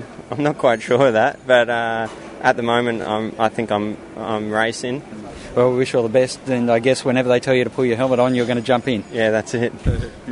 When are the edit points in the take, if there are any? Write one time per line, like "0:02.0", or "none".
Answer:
none